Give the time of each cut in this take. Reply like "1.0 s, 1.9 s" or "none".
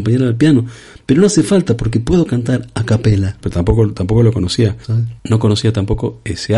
3.4 s, 4.8 s